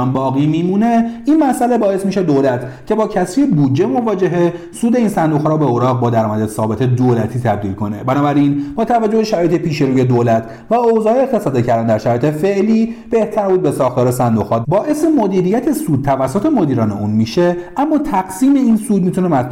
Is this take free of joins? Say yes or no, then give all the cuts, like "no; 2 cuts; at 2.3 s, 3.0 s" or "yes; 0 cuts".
no; 1 cut; at 14.6 s